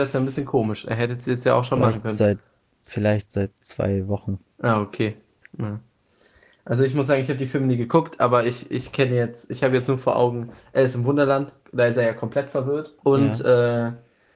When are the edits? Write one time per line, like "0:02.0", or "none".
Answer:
0:13.0